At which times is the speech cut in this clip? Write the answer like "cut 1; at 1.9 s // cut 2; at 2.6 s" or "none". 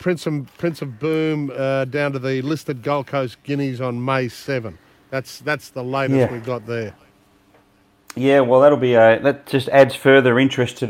none